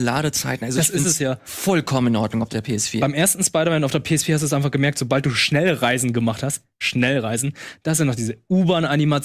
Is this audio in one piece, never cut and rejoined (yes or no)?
yes